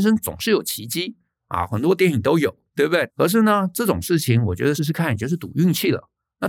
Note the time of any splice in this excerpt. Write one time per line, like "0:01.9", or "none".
0:03.1
0:04.8